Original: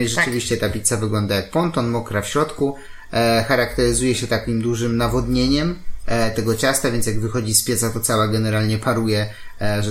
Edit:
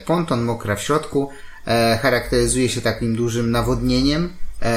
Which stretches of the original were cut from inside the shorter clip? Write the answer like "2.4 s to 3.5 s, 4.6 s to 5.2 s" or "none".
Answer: none

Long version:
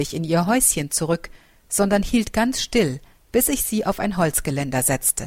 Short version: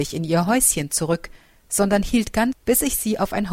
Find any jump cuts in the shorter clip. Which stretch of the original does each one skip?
2.5 s to 3.2 s

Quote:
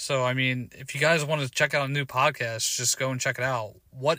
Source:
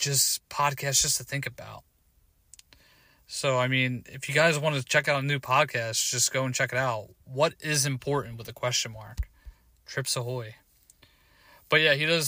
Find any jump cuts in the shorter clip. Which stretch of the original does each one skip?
none

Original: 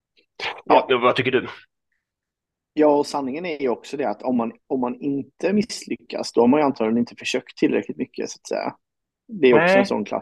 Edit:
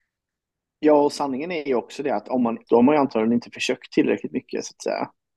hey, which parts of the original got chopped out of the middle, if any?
4.6 s to 6.3 s

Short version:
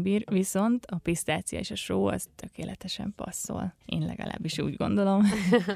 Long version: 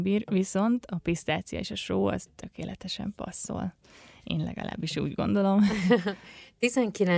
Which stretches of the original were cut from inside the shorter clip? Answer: 3.8 s to 4.2 s

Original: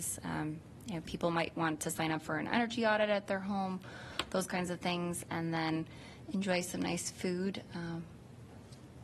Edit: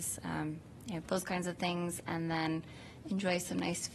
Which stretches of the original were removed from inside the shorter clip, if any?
1.0 s to 4.3 s

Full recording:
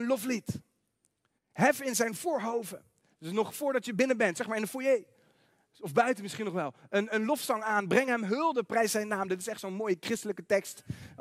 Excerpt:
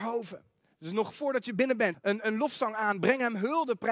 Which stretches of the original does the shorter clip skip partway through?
4.3 s to 6.8 s

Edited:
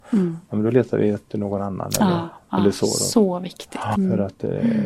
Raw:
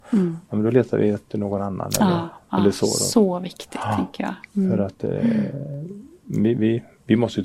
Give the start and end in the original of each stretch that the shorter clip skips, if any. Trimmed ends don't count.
4.0 s to 4.6 s

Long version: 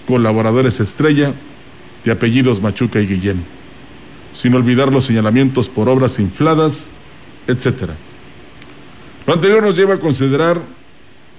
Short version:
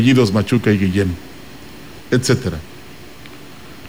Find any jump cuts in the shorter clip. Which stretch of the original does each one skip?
4.3 s to 7.4 s

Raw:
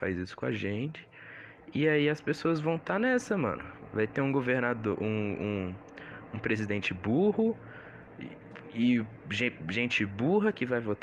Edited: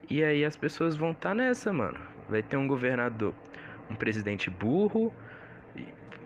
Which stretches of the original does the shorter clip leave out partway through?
5.0 s to 5.8 s

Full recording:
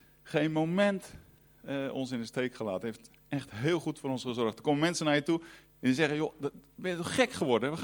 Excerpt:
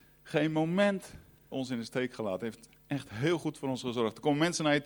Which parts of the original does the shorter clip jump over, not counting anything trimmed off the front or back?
1.5 s to 1.9 s

